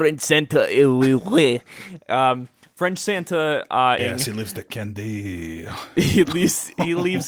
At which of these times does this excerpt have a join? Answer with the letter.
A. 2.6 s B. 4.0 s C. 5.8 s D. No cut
B